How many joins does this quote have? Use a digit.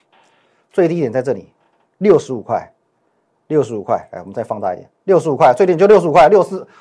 0